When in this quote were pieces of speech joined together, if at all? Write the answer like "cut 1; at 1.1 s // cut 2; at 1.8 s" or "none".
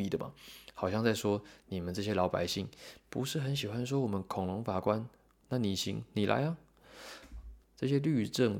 cut 1; at 5.4 s // cut 2; at 7.6 s